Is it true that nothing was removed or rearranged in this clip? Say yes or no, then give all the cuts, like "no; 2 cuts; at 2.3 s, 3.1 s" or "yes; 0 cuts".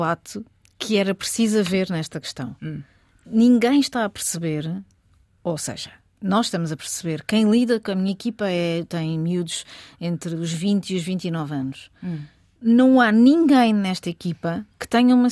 yes; 0 cuts